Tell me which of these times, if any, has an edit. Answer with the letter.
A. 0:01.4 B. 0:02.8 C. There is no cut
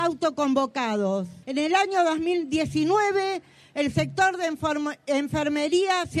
A